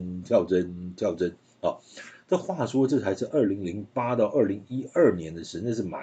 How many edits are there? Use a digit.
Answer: 0